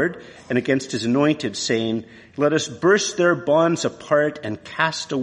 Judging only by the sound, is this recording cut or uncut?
uncut